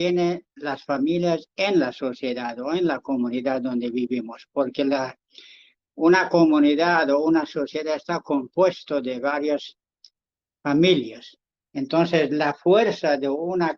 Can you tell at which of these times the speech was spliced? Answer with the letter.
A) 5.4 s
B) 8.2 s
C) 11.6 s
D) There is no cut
C